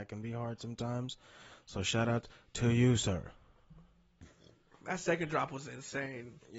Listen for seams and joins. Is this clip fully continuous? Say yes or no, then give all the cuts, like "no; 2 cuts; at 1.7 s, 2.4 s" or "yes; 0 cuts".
yes; 0 cuts